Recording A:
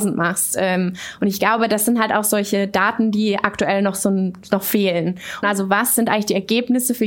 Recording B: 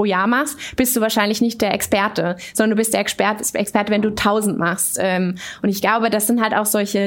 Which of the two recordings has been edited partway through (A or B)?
A